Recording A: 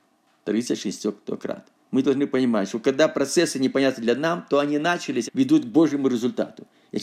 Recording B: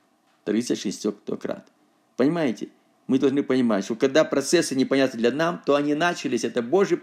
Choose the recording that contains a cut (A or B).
A